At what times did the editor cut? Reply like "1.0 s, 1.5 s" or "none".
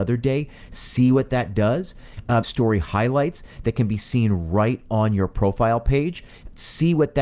2.4 s